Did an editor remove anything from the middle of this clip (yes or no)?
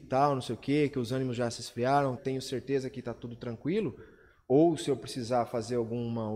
yes